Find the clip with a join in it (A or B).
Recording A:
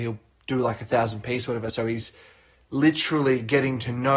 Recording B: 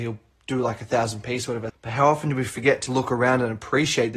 B